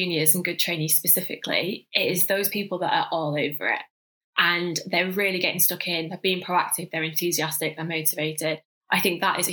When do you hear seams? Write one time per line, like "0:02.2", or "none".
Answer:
none